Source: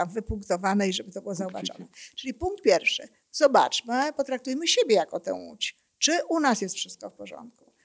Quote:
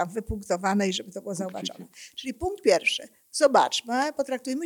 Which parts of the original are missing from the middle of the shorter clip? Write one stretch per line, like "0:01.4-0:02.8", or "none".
none